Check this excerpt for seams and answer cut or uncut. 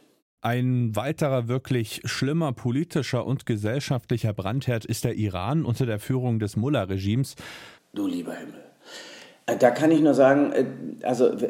cut